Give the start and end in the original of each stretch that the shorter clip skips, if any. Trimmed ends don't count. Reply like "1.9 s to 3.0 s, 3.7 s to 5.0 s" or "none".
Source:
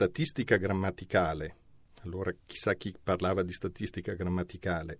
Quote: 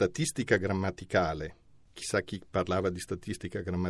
1.9 s to 2.4 s